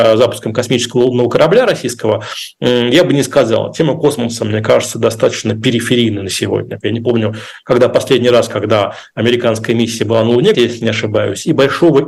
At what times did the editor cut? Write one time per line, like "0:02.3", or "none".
0:06.8
0:10.5